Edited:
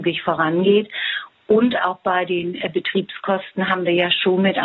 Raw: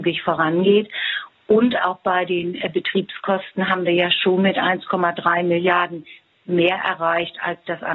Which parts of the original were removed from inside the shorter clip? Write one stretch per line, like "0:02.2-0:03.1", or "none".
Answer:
none